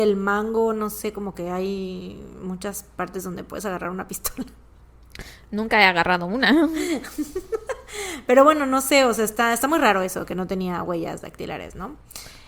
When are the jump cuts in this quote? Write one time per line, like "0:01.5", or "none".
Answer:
none